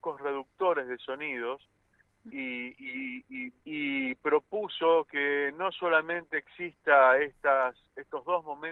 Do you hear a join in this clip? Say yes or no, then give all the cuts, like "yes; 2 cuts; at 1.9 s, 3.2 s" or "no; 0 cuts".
yes; 2 cuts; at 2.3 s, 3.6 s